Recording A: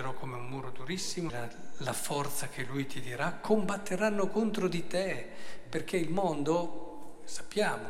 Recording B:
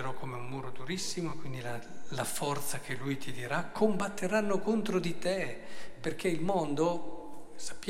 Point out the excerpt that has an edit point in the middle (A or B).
A